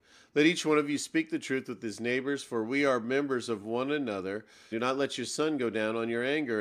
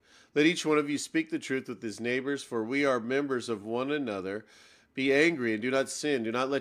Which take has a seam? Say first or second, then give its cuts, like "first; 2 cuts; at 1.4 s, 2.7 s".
first; 1 cut; at 4.7 s